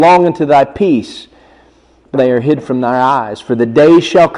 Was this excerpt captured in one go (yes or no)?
no